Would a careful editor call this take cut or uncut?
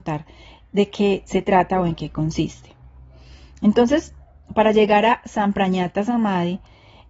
uncut